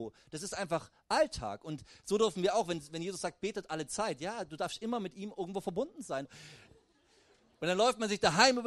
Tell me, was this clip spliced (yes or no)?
yes